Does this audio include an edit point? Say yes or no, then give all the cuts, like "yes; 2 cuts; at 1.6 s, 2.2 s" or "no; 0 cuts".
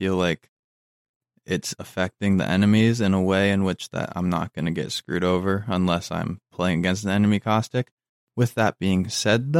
no; 0 cuts